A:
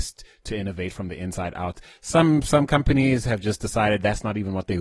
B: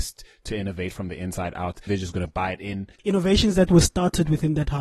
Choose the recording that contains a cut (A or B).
B